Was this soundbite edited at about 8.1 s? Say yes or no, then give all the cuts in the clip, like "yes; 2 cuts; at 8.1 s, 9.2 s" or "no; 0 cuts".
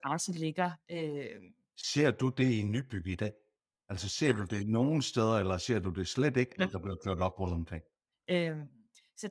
yes; 2 cuts; at 6.6 s, 8.1 s